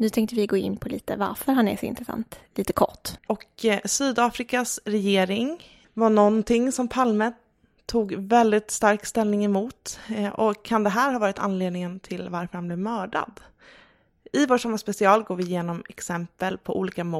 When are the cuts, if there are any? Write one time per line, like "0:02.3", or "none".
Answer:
0:03.2